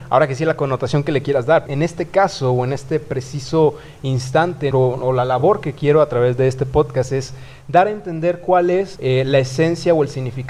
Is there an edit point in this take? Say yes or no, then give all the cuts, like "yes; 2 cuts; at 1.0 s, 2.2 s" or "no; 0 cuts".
yes; 3 cuts; at 1.7 s, 4.7 s, 9.0 s